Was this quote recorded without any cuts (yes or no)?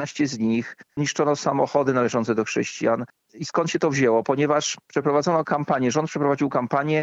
no